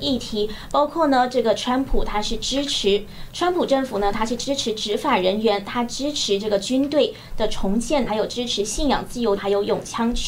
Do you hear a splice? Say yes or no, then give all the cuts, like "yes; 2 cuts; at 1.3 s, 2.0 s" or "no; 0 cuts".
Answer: yes; 2 cuts; at 8.1 s, 9.4 s